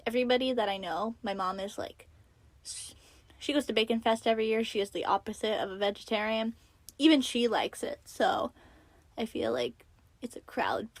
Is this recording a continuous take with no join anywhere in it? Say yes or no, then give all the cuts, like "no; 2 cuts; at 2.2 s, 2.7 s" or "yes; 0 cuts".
yes; 0 cuts